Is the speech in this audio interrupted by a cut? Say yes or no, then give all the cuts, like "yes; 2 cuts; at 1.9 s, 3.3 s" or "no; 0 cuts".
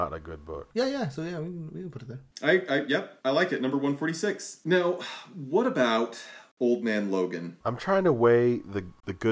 no; 0 cuts